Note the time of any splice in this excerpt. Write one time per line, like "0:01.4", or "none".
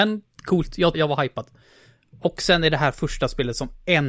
0:00.9